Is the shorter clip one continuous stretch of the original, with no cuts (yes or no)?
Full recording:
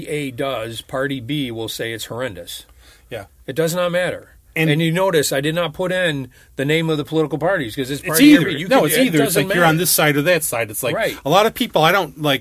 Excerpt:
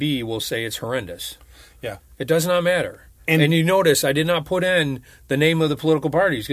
yes